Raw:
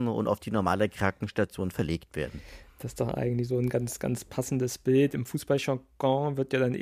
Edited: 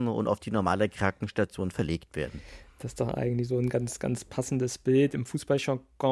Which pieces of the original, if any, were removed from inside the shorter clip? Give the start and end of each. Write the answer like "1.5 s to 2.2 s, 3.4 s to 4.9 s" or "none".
none